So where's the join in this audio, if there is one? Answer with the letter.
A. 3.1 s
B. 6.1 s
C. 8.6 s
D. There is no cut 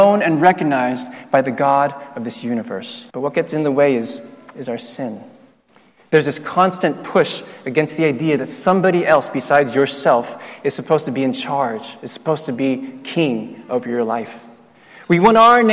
A